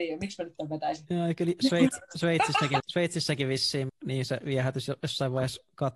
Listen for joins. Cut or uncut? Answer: cut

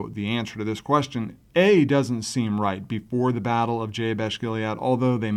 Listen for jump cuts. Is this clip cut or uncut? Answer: cut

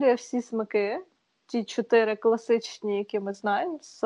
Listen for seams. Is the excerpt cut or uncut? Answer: uncut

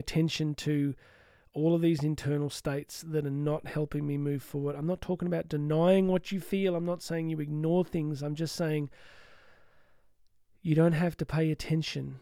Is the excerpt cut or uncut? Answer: uncut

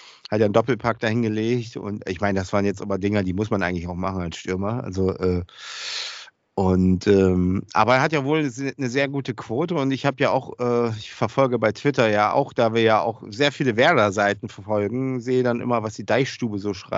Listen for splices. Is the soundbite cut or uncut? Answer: uncut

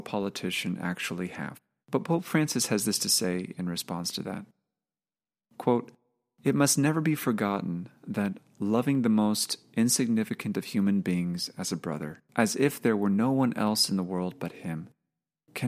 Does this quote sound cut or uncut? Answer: cut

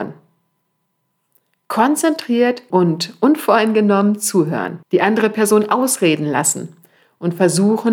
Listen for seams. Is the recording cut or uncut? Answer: cut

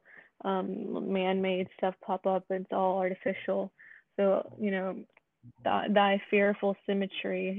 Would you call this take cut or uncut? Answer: cut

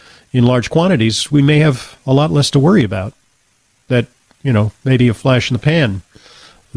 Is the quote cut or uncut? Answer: uncut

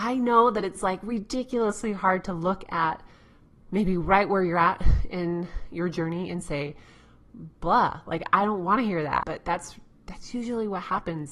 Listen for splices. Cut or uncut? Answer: cut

